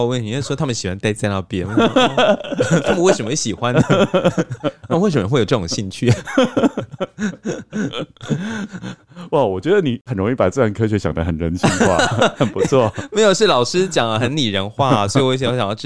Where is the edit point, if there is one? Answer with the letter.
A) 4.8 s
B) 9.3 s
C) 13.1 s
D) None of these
D